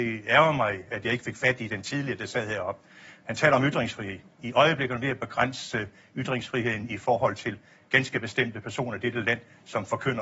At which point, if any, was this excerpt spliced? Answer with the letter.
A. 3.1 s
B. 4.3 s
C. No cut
C